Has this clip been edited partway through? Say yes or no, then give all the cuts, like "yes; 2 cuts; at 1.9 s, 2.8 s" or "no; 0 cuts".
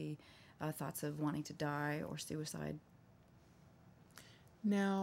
no; 0 cuts